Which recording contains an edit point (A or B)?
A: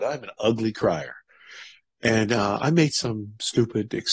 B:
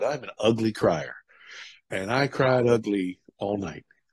A